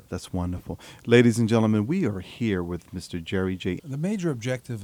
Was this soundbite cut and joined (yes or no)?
yes